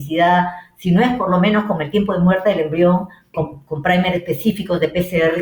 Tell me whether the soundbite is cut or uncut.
cut